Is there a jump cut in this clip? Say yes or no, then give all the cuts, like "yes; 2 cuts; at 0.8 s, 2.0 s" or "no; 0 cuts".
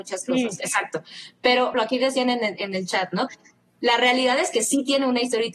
yes; 2 cuts; at 1.7 s, 3.3 s